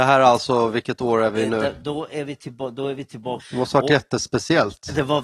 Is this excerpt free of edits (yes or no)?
no